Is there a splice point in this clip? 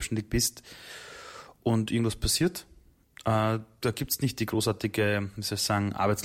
no; 0 cuts

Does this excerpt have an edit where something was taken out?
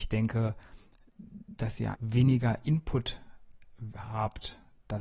yes; 1 cut; at 1.9 s

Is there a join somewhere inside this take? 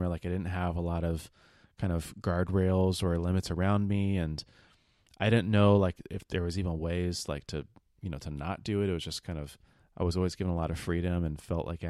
no; 0 cuts

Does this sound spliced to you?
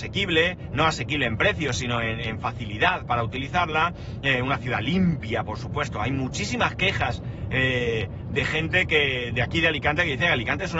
no; 0 cuts

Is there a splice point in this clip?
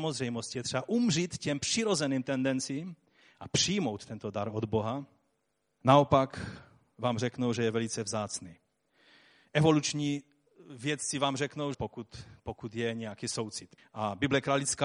yes; 3 cuts; at 5.7 s, 11.7 s, 13.8 s

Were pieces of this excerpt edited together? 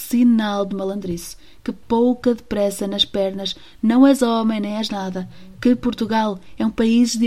no; 0 cuts

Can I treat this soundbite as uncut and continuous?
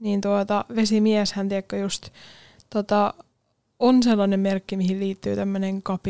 yes; 0 cuts

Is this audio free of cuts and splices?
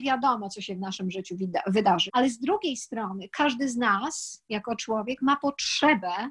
no; 1 cut; at 2.1 s

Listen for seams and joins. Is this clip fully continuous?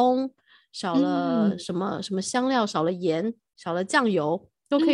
yes; 0 cuts

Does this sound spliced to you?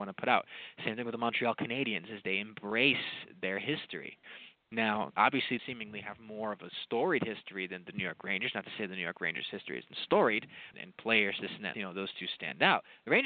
yes; 3 cuts; at 5.6 s, 10.7 s, 11.7 s

